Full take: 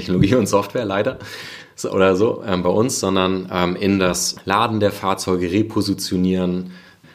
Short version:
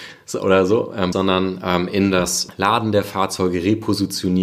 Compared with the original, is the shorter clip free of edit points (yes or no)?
no